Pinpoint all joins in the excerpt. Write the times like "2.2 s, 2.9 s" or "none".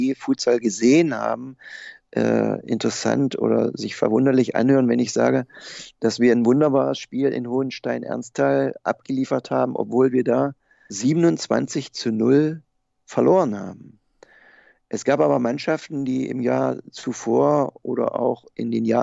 10.9 s